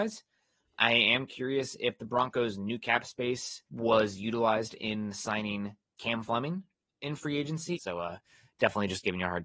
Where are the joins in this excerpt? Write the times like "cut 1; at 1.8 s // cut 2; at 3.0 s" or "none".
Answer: cut 1; at 3.7 s // cut 2; at 7.7 s